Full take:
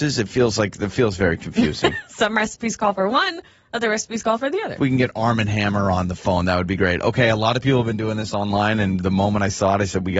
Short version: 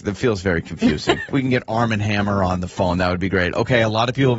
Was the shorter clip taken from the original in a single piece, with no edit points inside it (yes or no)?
no